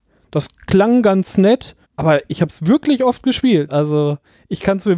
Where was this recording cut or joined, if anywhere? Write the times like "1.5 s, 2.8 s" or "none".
1.8 s, 3.7 s